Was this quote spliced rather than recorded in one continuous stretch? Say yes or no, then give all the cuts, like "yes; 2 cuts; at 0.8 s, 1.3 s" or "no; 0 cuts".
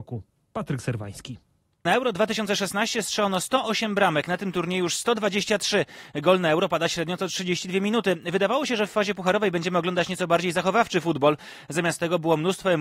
no; 0 cuts